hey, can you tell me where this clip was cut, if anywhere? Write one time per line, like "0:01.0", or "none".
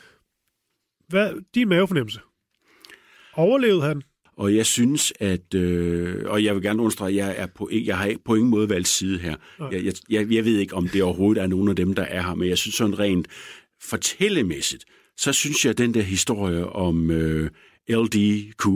0:04.3